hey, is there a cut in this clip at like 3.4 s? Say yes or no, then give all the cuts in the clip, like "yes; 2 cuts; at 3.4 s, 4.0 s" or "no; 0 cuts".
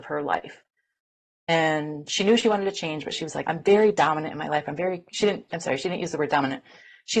yes; 1 cut; at 3.4 s